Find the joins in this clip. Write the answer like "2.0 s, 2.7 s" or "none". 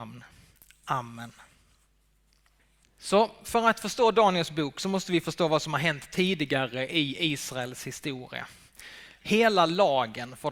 9.2 s

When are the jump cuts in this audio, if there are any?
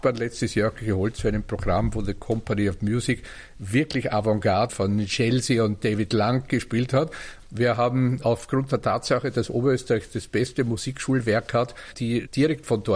4.7 s, 7.4 s, 11.9 s

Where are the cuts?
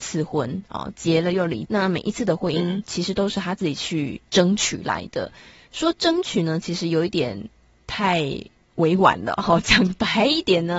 1.6 s

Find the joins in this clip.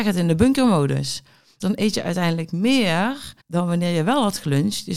1.6 s, 3.4 s

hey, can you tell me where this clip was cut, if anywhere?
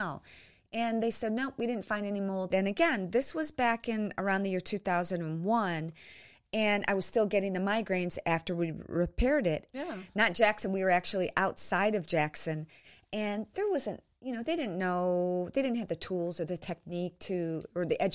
2.5 s, 9.7 s

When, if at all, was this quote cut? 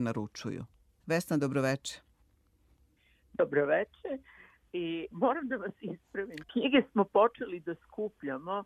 1.0 s, 5.1 s, 6.4 s

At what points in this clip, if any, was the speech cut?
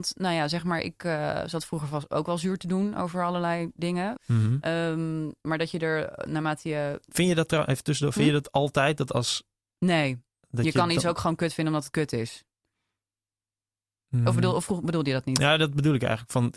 4.2 s

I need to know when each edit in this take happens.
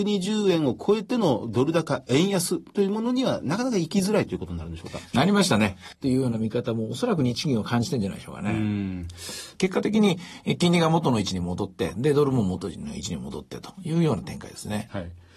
5.9 s, 9.5 s

